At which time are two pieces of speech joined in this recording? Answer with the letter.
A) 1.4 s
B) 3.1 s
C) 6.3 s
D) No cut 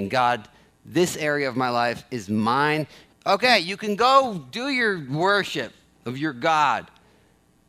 B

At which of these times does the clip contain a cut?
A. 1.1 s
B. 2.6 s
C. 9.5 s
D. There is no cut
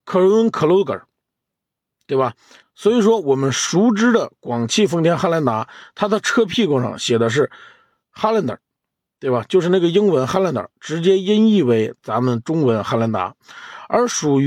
B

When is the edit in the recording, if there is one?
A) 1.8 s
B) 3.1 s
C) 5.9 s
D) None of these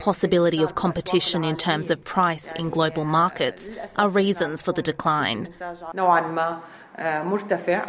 C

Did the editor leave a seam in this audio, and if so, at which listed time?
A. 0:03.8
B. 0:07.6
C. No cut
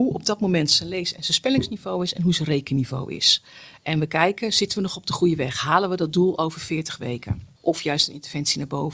B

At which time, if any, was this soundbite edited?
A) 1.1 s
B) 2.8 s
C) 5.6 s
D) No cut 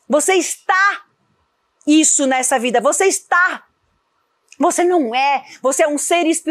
D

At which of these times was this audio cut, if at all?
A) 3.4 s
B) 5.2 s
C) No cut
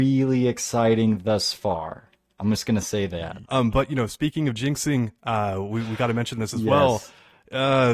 A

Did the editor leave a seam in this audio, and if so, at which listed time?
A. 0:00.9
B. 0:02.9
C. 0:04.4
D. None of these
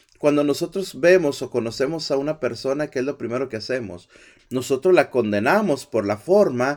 C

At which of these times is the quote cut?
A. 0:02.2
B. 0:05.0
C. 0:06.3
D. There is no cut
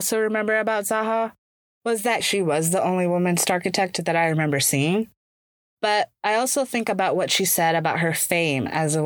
A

